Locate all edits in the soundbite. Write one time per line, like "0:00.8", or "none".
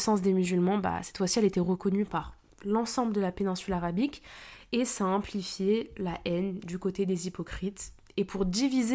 none